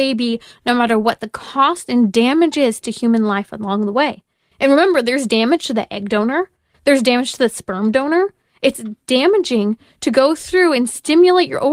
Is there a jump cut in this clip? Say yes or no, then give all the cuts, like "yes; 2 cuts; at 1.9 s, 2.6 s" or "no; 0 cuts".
no; 0 cuts